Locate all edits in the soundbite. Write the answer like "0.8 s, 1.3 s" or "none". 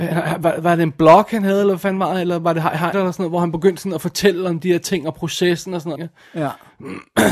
2.9 s, 6.0 s